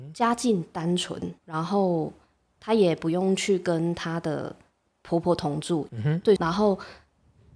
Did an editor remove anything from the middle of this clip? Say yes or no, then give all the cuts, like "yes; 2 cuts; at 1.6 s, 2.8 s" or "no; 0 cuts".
yes; 2 cuts; at 1.4 s, 6.4 s